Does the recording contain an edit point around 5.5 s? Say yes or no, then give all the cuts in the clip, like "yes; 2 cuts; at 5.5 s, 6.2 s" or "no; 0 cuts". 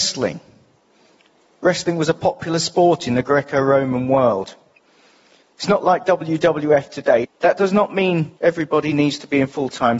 no; 2 cuts; at 7.2 s, 8.4 s